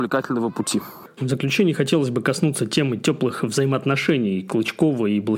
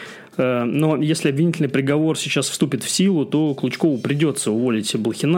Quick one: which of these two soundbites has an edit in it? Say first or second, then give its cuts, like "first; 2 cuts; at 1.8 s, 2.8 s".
first; 1 cut; at 1.2 s